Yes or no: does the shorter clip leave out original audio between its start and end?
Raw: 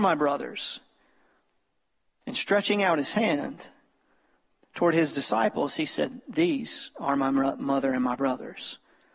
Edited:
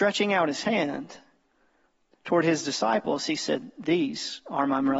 no